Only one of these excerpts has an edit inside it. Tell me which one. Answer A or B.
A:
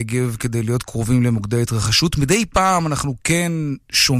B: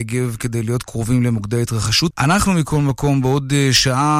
B